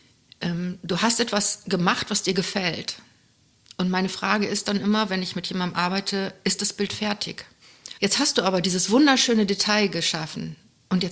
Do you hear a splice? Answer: yes; 1 cut; at 8.0 s

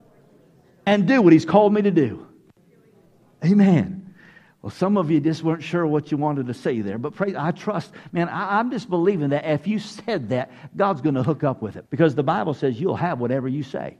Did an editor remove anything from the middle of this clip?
yes; 1 cut; at 11.8 s

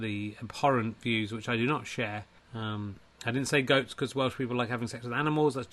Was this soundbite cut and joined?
yes; 1 cut; at 2.4 s

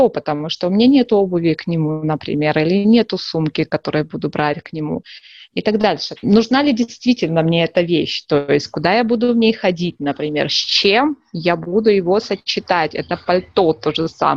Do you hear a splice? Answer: yes; 1 cut; at 6.2 s

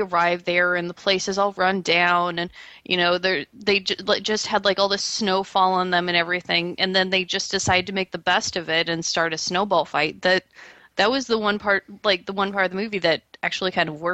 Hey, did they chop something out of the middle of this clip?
no; 0 cuts

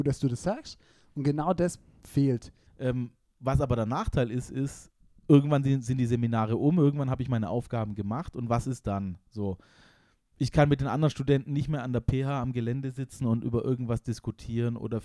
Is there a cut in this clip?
yes; 1 cut; at 2.7 s

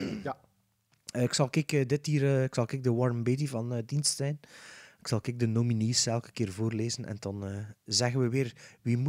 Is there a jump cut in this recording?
no; 0 cuts

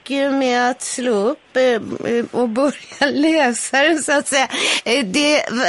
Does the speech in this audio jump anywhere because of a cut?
no; 0 cuts

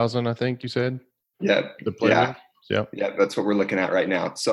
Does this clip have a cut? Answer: no; 0 cuts

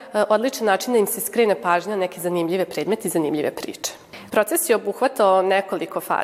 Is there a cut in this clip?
yes; 1 cut; at 4.3 s

